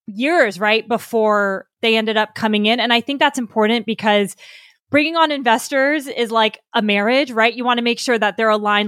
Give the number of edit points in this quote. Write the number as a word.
zero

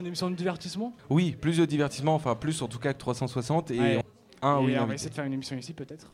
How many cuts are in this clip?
two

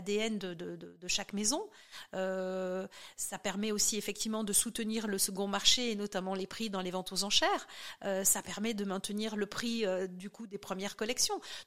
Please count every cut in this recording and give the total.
zero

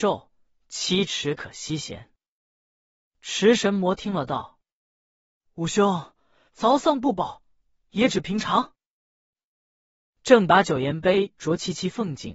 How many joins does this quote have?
two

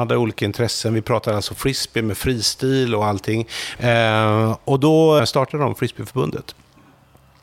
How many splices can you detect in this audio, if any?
two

